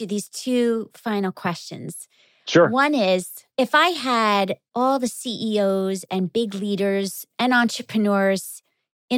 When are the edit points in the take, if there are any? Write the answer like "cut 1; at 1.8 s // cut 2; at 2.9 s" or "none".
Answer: cut 1; at 3.5 s